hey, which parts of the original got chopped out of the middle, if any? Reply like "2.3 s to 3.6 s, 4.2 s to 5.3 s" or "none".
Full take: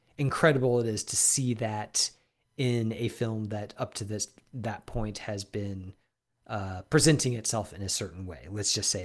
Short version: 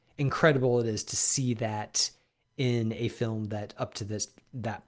none